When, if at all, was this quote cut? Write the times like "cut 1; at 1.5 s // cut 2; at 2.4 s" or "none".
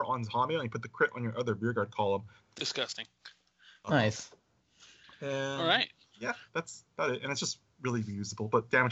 cut 1; at 2.4 s